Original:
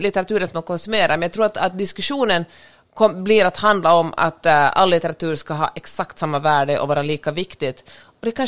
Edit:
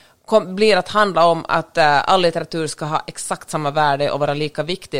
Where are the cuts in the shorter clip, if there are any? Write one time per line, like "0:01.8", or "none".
none